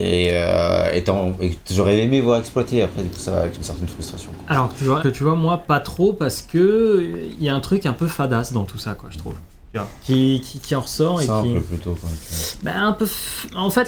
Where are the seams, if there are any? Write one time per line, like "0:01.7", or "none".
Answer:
0:05.0